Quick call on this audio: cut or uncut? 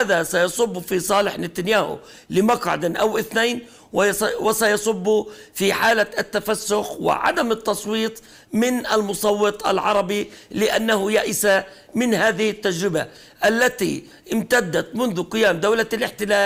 uncut